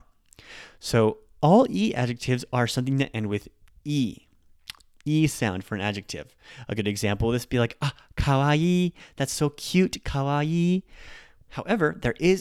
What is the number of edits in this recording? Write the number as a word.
zero